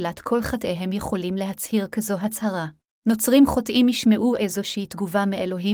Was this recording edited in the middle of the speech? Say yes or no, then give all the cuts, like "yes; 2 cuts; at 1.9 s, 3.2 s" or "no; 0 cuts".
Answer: yes; 1 cut; at 3.0 s